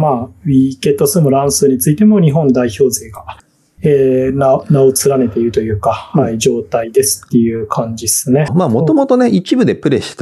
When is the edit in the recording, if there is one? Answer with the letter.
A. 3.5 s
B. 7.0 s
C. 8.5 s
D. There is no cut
C